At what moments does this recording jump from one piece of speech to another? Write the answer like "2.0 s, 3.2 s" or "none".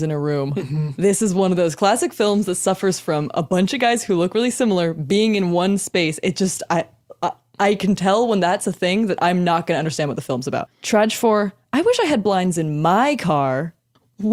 10.7 s